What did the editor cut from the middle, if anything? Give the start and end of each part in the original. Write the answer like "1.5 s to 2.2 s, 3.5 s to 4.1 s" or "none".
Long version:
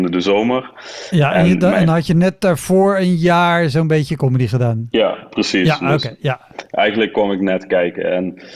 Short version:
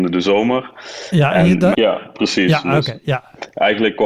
1.7 s to 4.9 s